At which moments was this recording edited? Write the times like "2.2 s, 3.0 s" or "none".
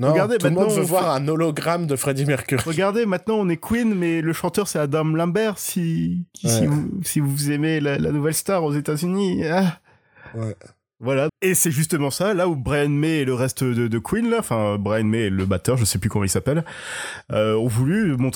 11.3 s

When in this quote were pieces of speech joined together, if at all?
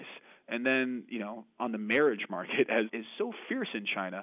2.9 s

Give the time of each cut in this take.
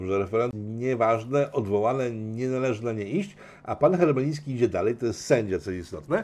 none

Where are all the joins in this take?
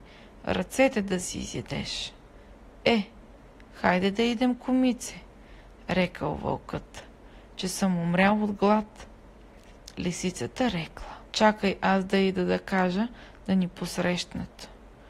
9.9 s, 11.3 s

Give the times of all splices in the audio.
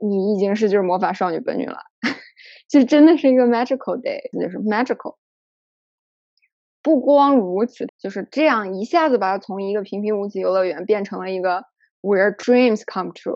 4.3 s, 7.9 s

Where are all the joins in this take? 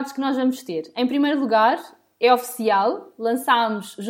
none

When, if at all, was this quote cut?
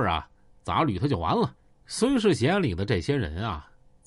1.8 s

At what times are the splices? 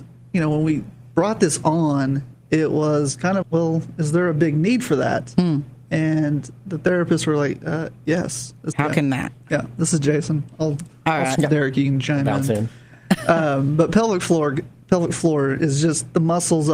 3.4 s, 8.7 s, 11.4 s

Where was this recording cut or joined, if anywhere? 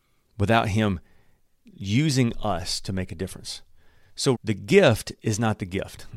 4.3 s

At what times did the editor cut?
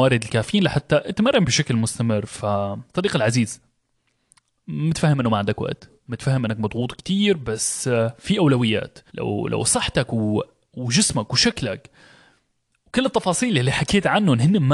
2.9 s, 9.1 s

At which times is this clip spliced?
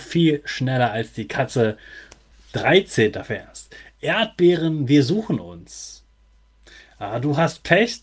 2.3 s

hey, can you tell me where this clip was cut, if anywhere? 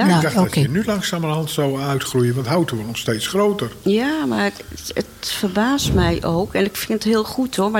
none

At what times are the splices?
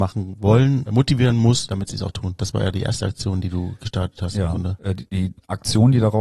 2.4 s

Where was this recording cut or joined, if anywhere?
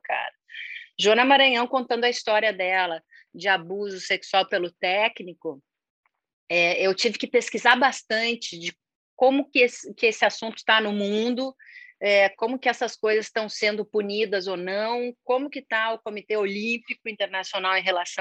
9.5 s

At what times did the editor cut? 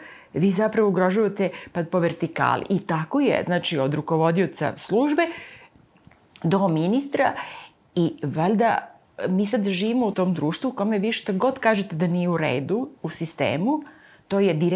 10.1 s, 13.0 s

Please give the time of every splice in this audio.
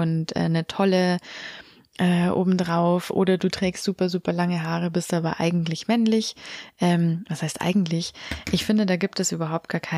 none

